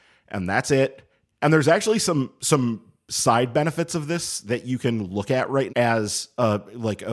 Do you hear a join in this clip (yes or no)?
yes